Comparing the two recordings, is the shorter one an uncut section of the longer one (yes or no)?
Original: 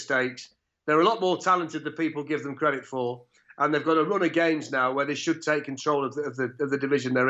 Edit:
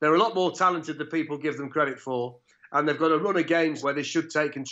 no